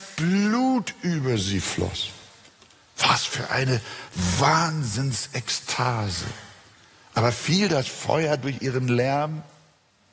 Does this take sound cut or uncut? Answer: uncut